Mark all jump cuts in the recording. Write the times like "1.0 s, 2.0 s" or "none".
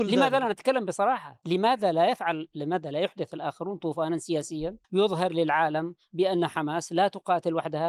4.8 s